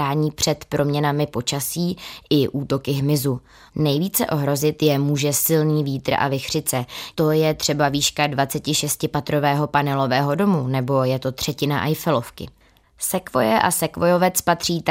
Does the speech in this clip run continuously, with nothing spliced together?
no; 2 cuts; at 3.7 s, 7.1 s

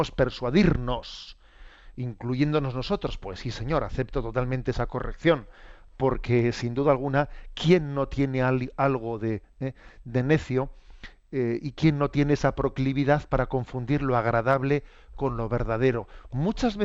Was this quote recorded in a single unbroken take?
yes; 0 cuts

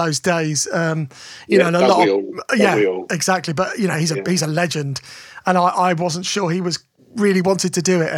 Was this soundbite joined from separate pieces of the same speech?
no; 0 cuts

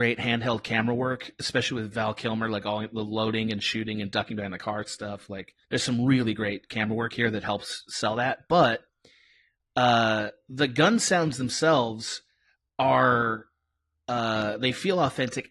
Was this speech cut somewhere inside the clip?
yes; 1 cut; at 5.6 s

